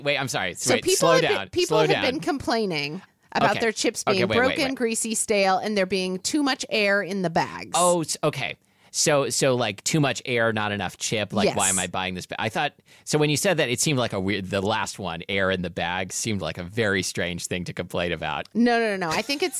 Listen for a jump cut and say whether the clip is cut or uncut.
uncut